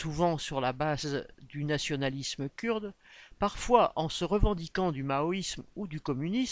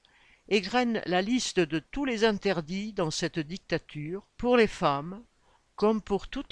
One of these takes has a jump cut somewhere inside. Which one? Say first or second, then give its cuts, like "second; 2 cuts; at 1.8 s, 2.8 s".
second; 1 cut; at 4.3 s